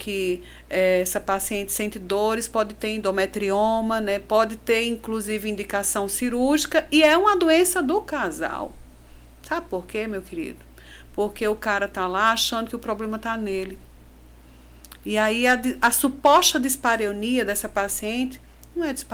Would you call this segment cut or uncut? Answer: uncut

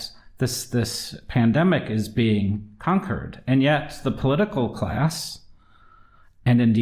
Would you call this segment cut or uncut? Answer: uncut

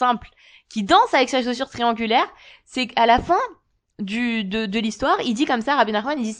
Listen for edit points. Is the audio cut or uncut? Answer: uncut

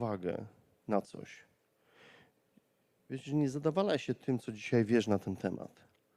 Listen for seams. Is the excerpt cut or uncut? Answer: uncut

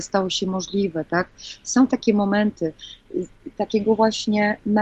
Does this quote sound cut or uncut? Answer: uncut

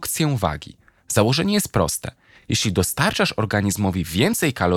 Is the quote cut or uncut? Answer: uncut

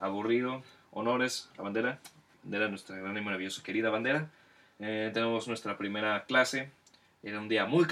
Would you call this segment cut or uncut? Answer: uncut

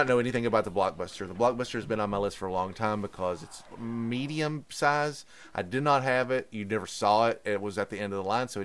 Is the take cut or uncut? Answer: uncut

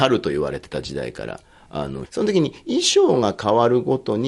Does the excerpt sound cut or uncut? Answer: cut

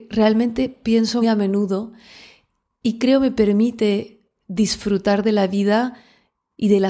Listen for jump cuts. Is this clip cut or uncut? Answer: cut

